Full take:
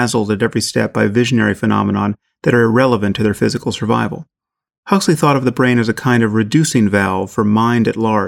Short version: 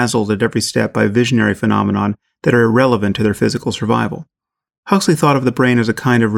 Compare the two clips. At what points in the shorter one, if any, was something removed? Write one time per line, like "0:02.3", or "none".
none